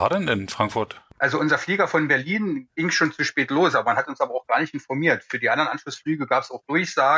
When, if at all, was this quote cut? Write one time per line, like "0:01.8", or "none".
0:01.1